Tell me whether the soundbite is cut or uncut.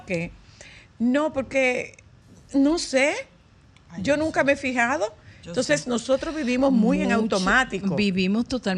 uncut